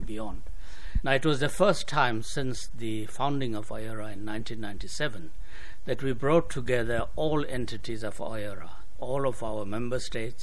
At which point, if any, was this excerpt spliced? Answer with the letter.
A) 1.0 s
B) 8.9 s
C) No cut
A